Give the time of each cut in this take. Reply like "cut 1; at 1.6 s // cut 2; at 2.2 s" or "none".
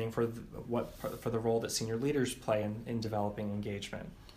none